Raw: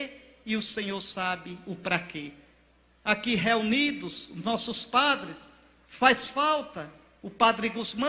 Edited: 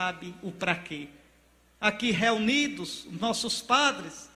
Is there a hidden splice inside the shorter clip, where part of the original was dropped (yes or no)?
no